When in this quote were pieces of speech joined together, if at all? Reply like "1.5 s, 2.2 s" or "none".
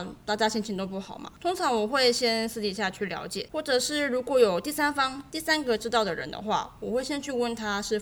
none